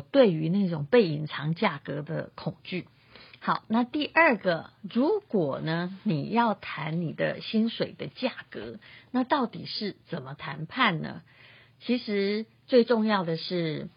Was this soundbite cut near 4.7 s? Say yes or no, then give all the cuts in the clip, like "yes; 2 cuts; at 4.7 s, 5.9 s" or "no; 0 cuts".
no; 0 cuts